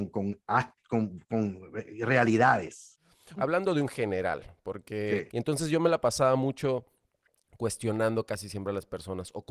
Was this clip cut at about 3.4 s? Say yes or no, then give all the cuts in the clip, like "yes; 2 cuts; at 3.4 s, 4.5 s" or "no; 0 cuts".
yes; 2 cuts; at 3.4 s, 5.3 s